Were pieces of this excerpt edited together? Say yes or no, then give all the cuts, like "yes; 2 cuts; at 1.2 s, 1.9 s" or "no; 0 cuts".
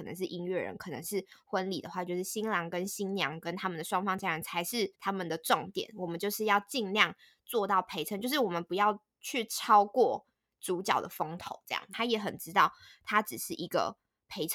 yes; 2 cuts; at 4.9 s, 11.9 s